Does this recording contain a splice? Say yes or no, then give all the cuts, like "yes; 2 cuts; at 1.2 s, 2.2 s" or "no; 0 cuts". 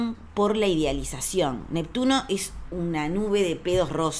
no; 0 cuts